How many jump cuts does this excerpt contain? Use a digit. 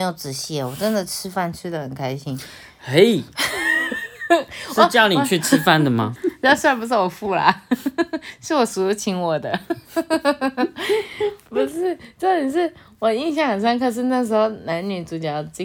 1